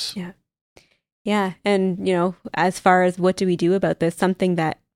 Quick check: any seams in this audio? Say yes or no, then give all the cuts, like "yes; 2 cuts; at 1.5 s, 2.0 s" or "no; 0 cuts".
no; 0 cuts